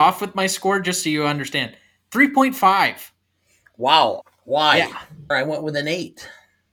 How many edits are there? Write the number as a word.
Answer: two